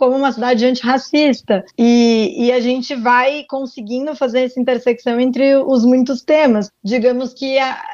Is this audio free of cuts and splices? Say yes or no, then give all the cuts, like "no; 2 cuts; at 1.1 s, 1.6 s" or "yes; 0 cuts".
no; 2 cuts; at 1.7 s, 6.7 s